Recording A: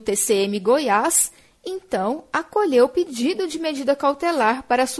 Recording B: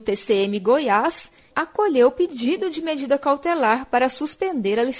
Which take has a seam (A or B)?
B